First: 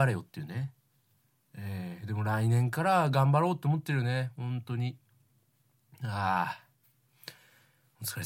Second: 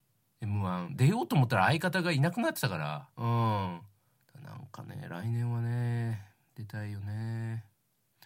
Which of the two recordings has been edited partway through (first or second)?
second